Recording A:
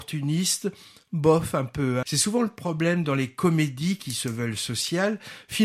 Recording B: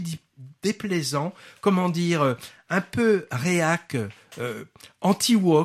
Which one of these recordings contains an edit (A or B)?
A